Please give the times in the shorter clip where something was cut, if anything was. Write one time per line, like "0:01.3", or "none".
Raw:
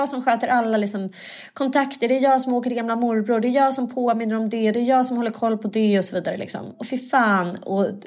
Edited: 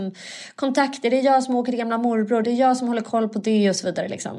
0:02.4